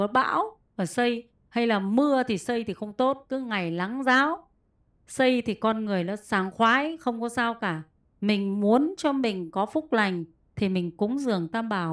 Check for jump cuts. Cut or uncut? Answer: uncut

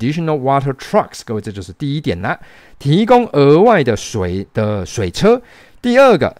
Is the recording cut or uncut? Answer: uncut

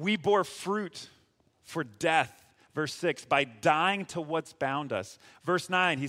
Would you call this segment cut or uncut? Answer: uncut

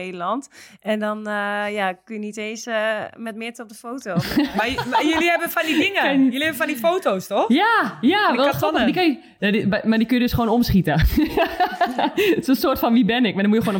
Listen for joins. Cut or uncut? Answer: uncut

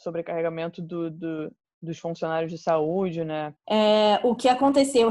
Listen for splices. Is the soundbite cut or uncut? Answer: cut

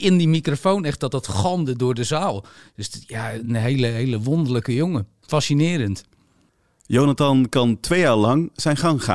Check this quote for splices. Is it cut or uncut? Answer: uncut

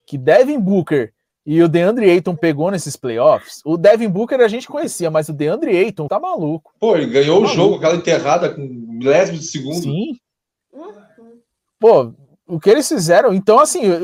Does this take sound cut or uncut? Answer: cut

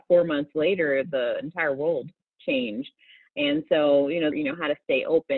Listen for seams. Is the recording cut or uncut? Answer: cut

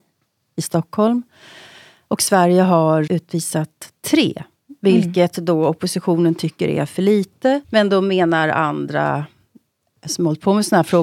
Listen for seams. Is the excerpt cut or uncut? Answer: cut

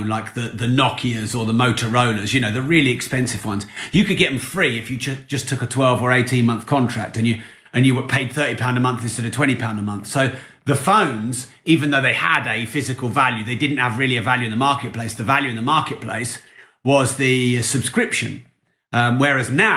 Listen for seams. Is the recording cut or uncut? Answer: uncut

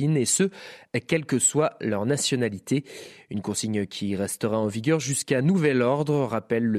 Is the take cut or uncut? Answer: uncut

